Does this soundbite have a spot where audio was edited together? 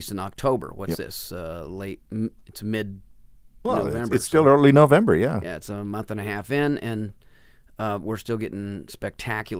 no; 0 cuts

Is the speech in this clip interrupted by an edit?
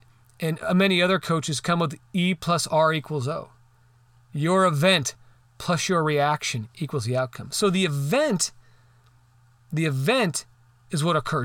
no; 0 cuts

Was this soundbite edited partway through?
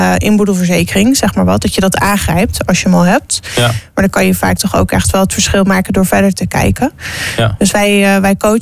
no; 0 cuts

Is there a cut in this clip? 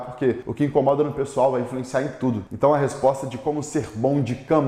no; 0 cuts

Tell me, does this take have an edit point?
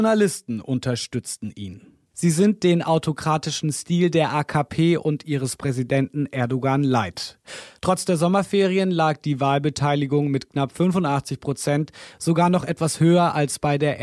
yes; 1 cut; at 2.1 s

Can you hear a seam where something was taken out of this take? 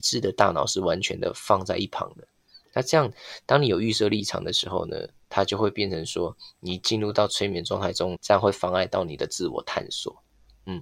yes; 1 cut; at 8.2 s

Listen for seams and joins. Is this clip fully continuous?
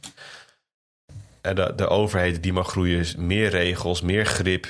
yes; 0 cuts

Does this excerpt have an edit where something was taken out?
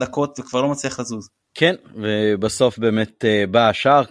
yes; 1 cut; at 1.5 s

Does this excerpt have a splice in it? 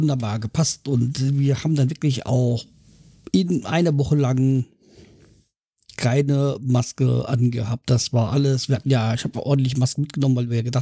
no; 0 cuts

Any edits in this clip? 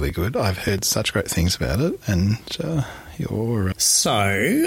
yes; 1 cut; at 3.7 s

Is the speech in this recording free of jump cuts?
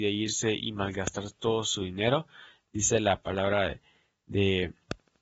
yes; 0 cuts

